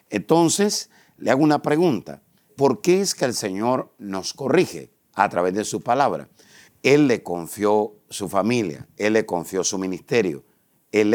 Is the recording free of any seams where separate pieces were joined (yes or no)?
no